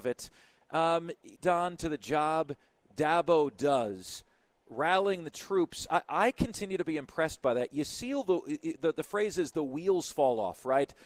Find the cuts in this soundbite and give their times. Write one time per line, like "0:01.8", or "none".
0:01.4